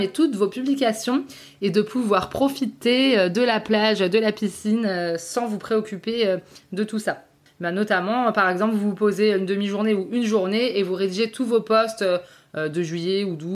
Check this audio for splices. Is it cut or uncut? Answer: cut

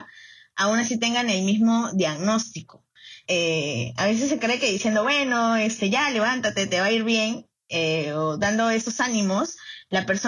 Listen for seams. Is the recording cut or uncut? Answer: cut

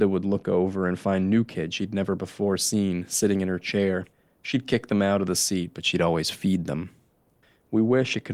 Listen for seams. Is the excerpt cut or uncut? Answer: uncut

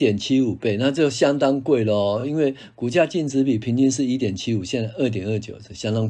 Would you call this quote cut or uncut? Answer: uncut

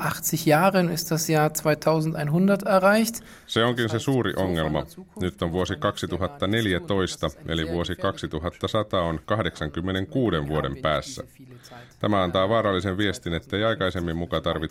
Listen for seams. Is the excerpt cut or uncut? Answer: uncut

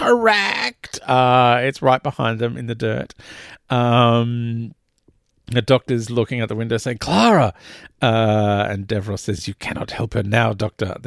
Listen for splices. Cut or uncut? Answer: uncut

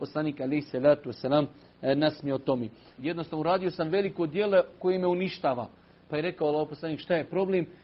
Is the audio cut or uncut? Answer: cut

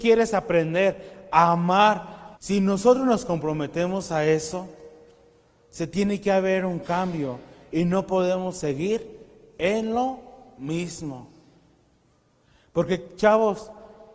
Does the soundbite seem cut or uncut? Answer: cut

